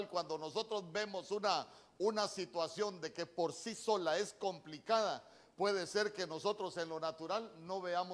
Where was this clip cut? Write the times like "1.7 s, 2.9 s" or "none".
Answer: none